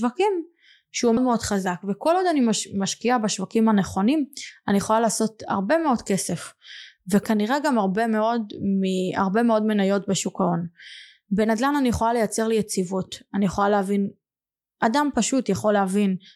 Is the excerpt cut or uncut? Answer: cut